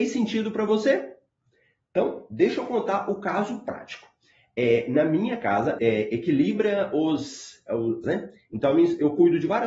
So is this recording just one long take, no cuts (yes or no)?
no